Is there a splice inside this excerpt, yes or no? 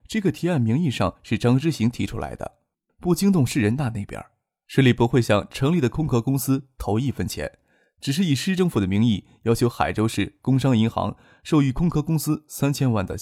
yes